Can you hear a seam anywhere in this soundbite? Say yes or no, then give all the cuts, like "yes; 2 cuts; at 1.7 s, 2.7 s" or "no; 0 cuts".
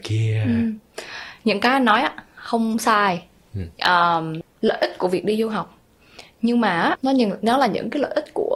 yes; 2 cuts; at 4.4 s, 7.0 s